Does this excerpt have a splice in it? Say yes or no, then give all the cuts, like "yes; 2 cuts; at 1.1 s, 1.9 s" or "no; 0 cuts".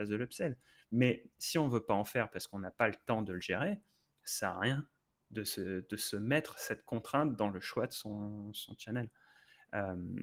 no; 0 cuts